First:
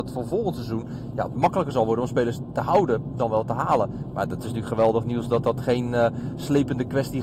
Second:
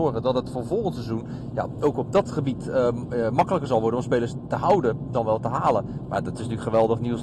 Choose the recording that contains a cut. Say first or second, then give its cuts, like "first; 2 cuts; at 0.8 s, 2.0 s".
first; 1 cut; at 1.4 s